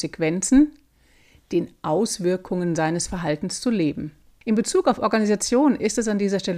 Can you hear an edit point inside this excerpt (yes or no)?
yes